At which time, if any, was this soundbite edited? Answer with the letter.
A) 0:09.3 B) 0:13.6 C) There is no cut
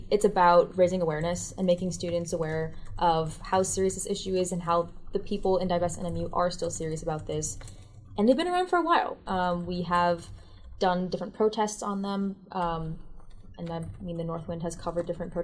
A